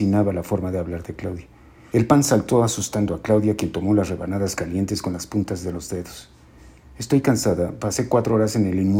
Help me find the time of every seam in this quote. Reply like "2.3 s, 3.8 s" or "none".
1.9 s

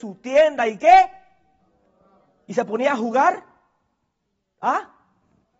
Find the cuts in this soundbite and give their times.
none

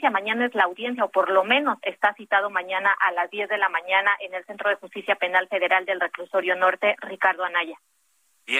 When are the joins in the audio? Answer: none

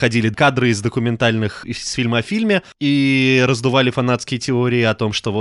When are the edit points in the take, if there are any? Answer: 1.6 s

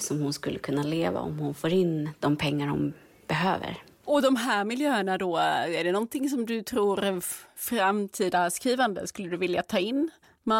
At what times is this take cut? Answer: none

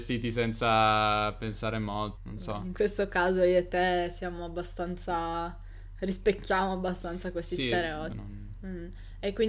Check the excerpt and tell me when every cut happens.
2.2 s, 8.1 s

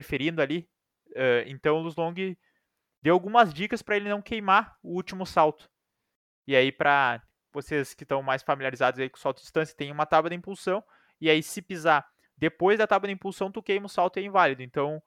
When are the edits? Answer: none

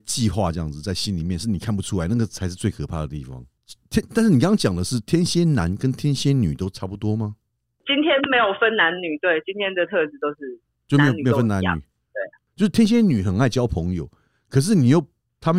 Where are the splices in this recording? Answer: none

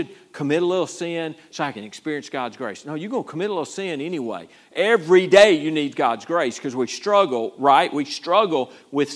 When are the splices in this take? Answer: none

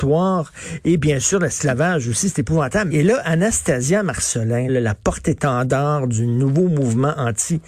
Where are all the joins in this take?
2.9 s, 4.7 s

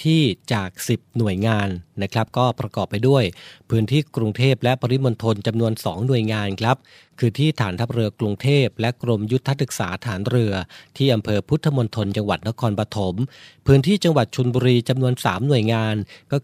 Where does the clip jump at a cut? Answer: none

